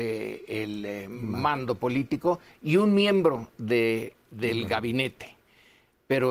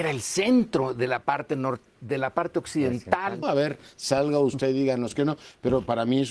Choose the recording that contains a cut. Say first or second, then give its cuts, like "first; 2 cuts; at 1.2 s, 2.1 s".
second; 1 cut; at 3.4 s